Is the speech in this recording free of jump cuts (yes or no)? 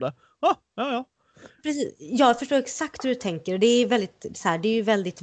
no